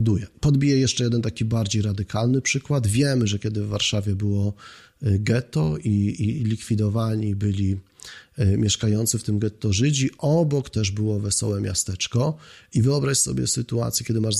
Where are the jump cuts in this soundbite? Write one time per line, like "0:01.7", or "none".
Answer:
none